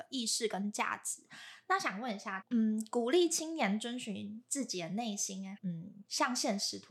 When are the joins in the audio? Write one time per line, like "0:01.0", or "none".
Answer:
0:02.4
0:05.6